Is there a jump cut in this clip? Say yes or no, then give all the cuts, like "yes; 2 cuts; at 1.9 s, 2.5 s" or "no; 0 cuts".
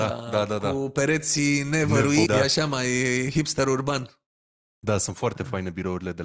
yes; 1 cut; at 2.3 s